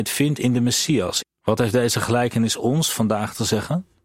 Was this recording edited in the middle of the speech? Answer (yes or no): yes